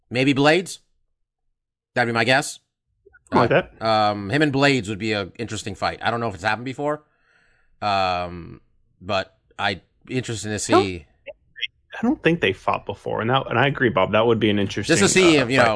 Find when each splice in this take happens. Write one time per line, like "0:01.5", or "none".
none